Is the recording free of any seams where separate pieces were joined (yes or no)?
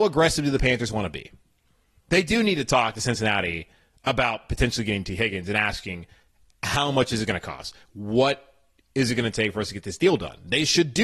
yes